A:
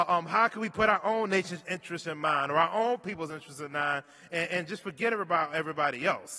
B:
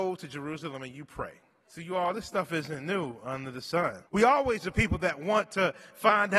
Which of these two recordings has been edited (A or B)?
B